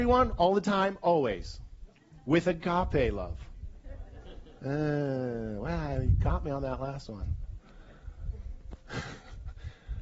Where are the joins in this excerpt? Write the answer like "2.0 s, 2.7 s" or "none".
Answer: none

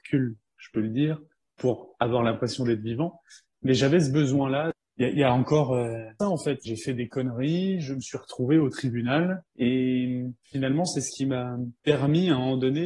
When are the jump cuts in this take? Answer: 6.2 s

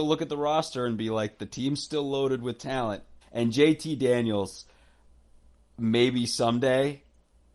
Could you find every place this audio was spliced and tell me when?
3.2 s

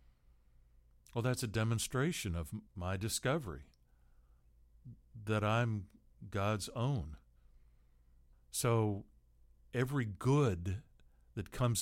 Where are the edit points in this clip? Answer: 2.7 s, 8.3 s

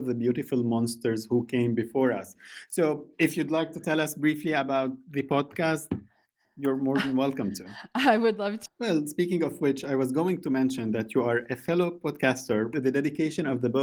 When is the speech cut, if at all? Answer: 8.7 s, 12.7 s

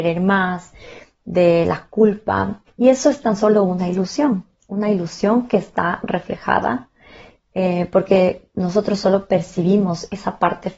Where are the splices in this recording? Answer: 2.7 s

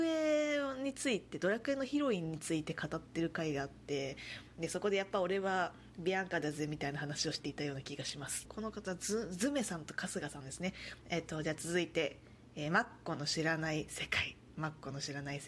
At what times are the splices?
8.4 s, 11.0 s

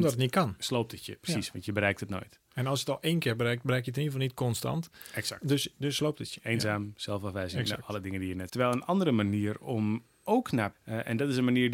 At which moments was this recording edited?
8.5 s, 10.7 s

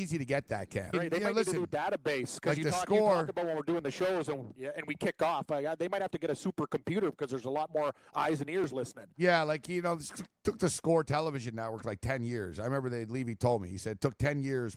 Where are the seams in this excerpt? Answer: 0.9 s

